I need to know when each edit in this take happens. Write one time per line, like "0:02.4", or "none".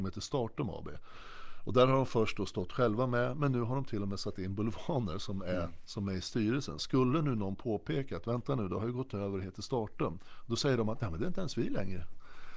0:06.8